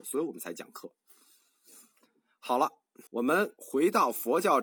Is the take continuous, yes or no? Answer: no